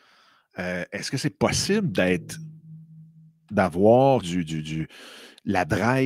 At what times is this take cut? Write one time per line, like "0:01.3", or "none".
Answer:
0:04.2